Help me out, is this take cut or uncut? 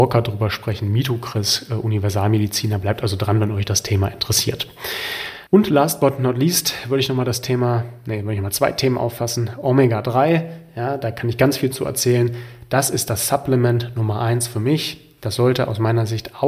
cut